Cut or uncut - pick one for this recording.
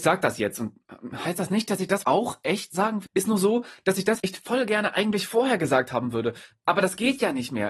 cut